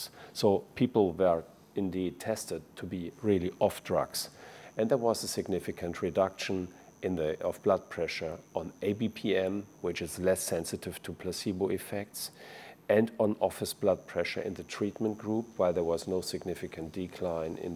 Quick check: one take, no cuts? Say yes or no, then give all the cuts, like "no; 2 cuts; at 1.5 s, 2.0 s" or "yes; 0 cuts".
no; 1 cut; at 7.4 s